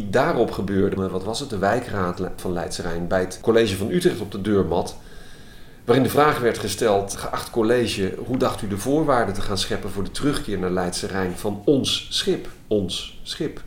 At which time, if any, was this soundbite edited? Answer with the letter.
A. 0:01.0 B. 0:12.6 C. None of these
A